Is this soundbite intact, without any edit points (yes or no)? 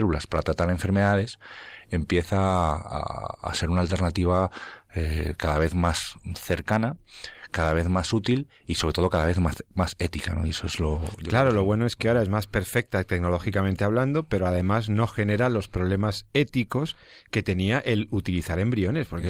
yes